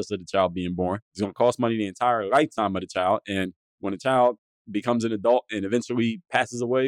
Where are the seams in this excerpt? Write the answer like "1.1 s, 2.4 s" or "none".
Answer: none